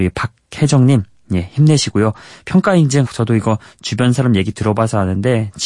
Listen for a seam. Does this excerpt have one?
yes; 1 cut; at 3.1 s

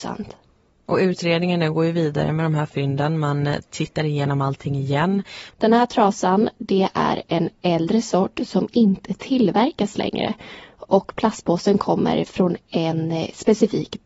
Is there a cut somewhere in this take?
yes; 1 cut; at 5.5 s

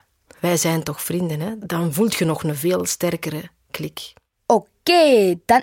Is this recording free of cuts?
yes; 0 cuts

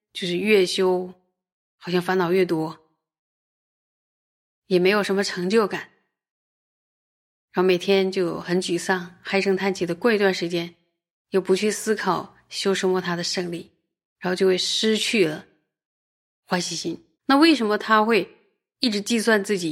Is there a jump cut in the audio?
yes; 1 cut; at 17.1 s

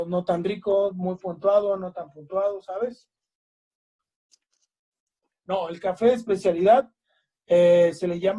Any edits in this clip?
yes; 1 cut; at 5.3 s

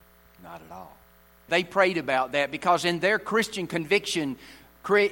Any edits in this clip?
yes; 1 cut; at 1.5 s

